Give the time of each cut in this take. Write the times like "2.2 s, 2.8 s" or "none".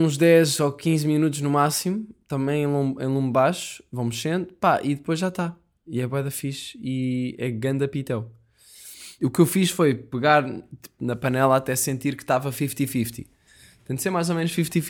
9.2 s, 11.0 s

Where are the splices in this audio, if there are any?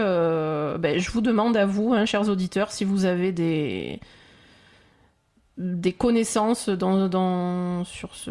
none

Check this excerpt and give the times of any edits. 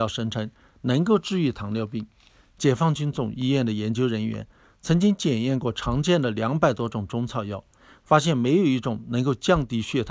none

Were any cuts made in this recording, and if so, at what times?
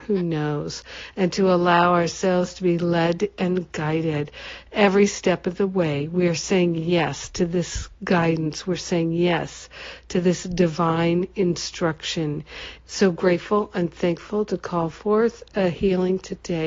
12.8 s

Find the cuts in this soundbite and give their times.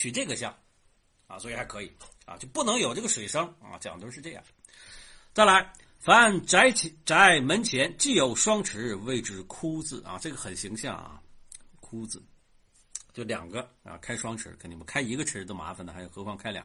none

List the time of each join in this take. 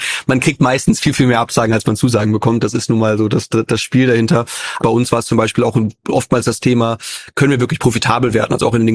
4.8 s

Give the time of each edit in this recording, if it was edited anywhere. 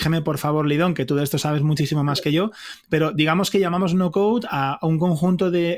none

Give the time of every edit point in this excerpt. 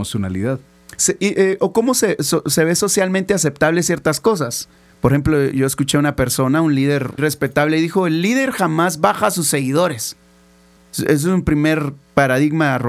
7.2 s, 10.8 s

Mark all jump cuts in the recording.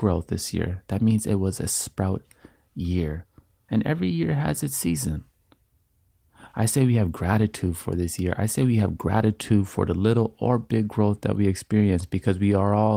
none

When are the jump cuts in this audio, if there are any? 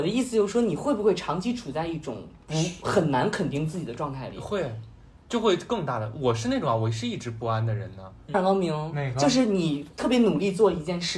8.3 s

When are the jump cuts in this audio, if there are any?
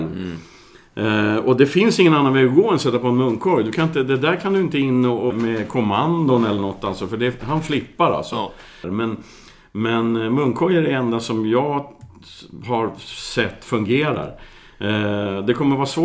5.3 s, 8.8 s

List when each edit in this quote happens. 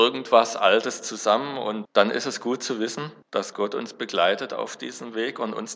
1.8 s, 3.2 s

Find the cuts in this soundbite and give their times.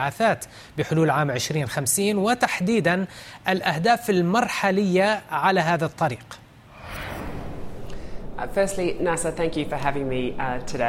none

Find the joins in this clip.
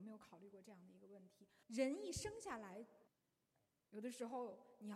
1.6 s, 3.1 s

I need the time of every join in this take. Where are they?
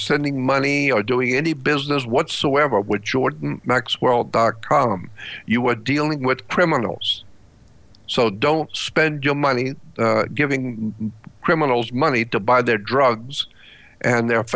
none

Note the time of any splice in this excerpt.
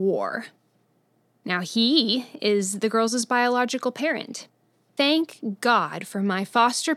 4.8 s

